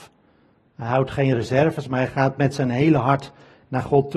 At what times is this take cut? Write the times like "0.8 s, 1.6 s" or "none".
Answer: none